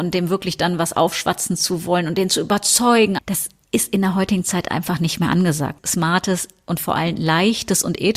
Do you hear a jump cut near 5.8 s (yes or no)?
yes